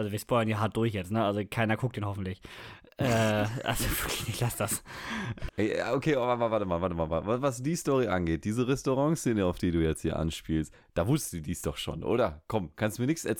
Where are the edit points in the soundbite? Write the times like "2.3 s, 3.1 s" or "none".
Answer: 5.5 s